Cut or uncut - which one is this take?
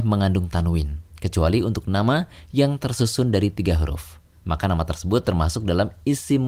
uncut